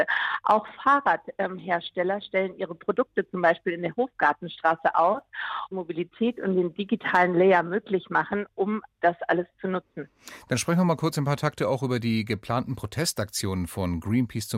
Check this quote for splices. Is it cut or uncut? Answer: cut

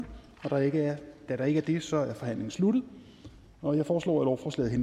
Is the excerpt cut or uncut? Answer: uncut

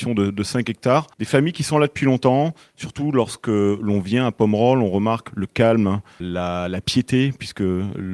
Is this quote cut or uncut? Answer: cut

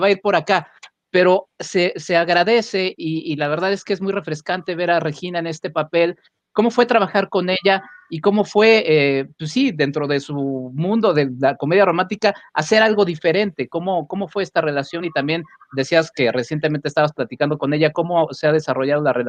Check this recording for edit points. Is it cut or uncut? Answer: uncut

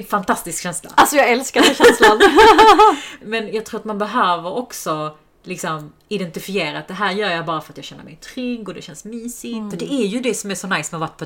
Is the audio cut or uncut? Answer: cut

